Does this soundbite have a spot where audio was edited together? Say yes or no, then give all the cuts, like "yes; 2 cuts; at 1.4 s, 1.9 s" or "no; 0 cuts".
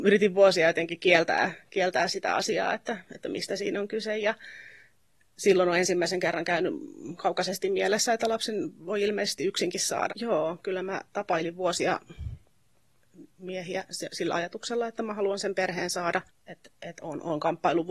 yes; 2 cuts; at 10.1 s, 16.3 s